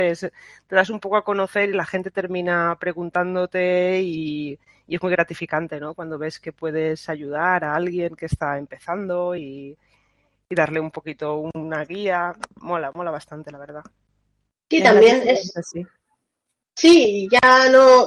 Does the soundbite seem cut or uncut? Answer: uncut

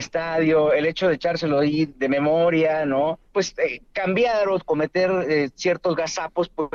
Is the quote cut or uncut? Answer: uncut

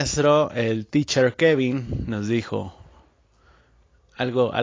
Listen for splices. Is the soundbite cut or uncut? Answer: uncut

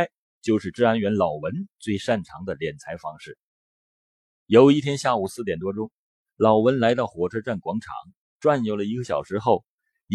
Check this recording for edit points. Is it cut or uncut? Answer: uncut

